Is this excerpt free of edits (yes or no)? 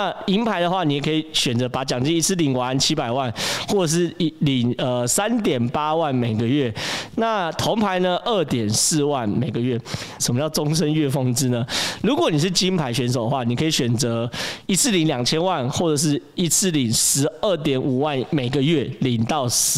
no